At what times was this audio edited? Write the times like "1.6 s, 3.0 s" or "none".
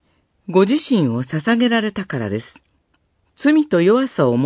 3.2 s